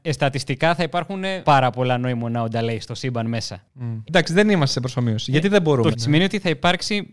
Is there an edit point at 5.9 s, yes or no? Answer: yes